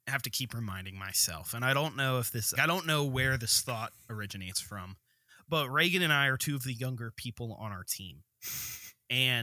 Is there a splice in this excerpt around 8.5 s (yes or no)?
no